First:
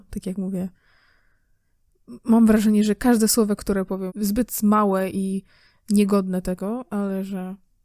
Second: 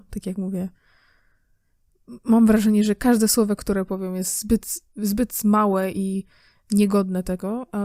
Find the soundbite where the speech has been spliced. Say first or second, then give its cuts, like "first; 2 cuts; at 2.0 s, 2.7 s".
first; 1 cut; at 4.1 s